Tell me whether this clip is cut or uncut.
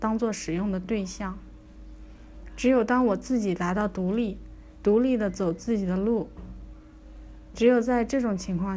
cut